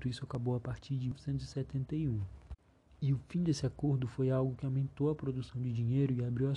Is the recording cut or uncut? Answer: uncut